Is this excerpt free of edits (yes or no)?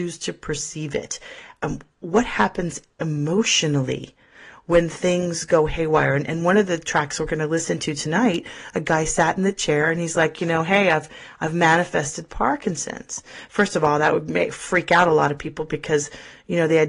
yes